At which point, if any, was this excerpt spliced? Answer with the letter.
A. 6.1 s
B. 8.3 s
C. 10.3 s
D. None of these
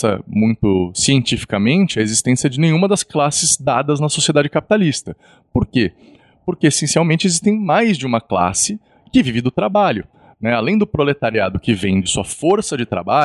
D